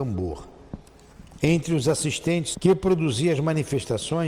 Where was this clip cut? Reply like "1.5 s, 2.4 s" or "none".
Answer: 1.4 s, 2.5 s